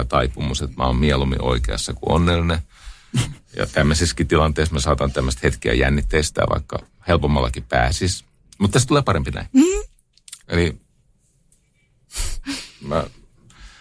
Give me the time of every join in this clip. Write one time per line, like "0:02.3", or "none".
0:10.4